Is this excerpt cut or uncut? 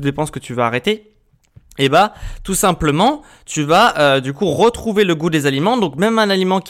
uncut